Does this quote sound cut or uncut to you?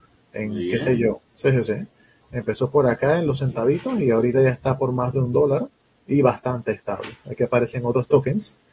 cut